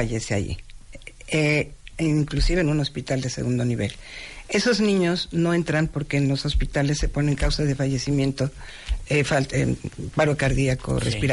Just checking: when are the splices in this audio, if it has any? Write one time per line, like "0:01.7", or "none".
none